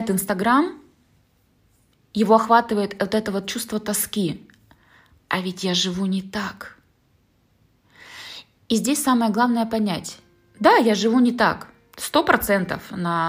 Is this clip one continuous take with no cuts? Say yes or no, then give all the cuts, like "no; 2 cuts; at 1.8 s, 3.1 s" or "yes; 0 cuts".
yes; 0 cuts